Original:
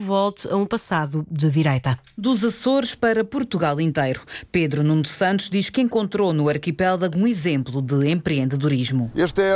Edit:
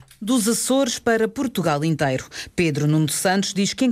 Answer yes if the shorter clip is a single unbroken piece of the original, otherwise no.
yes